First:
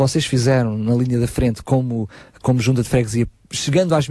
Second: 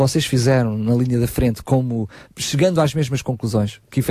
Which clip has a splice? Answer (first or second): second